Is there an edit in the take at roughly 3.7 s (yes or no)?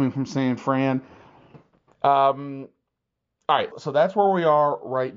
yes